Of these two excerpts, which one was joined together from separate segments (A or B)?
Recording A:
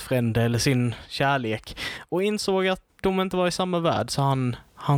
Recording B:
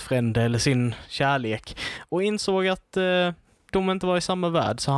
A